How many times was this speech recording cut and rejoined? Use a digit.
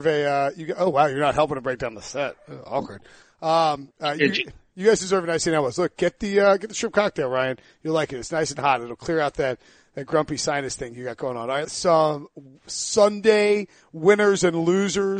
2